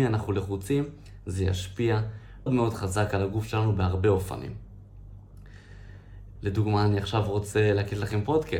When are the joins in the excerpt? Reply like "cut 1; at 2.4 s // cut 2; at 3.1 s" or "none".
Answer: cut 1; at 2.5 s // cut 2; at 6.4 s